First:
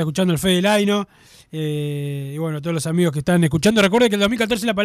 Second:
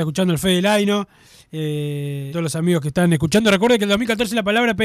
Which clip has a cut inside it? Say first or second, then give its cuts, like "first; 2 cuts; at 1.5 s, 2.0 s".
second; 1 cut; at 2.3 s